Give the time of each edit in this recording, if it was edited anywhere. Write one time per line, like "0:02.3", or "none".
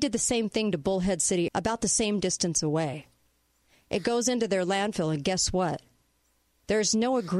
0:01.5